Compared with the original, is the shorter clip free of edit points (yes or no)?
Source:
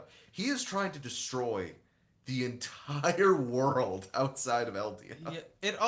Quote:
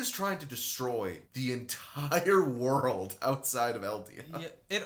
no